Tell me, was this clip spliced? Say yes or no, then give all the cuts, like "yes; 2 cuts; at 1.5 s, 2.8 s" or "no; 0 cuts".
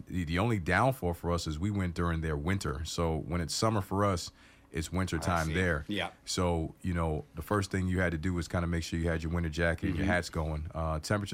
no; 0 cuts